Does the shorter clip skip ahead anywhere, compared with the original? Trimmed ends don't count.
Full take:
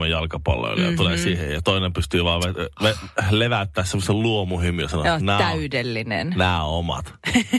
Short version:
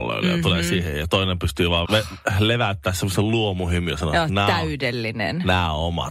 yes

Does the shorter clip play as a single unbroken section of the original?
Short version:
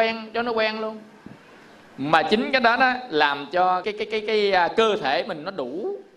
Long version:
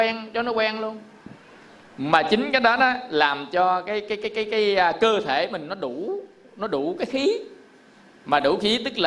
no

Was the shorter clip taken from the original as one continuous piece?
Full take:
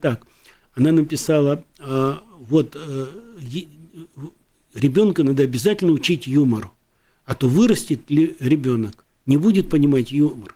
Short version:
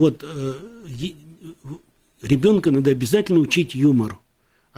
yes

